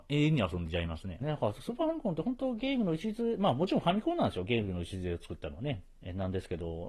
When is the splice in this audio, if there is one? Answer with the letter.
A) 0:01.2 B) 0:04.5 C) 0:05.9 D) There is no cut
A